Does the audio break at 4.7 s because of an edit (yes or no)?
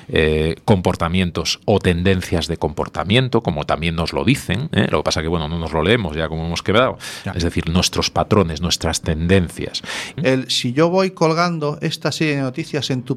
no